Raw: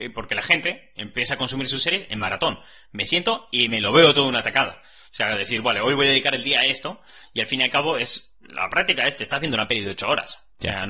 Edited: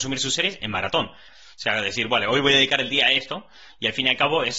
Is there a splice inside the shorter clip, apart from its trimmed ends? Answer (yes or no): yes